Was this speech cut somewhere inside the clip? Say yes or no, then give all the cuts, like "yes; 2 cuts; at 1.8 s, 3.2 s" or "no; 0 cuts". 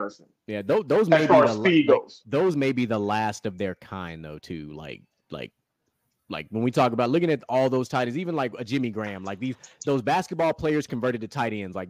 no; 0 cuts